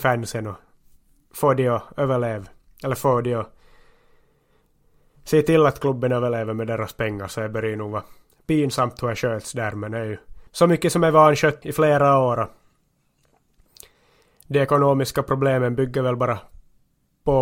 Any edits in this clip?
yes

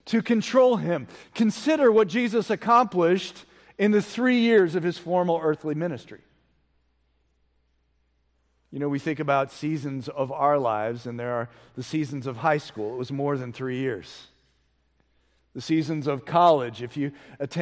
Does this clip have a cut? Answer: no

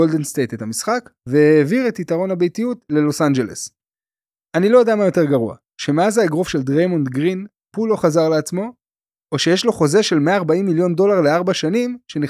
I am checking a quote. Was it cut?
no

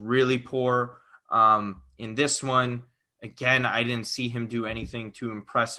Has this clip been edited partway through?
no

